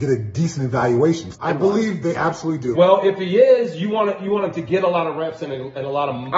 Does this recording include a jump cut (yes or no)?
yes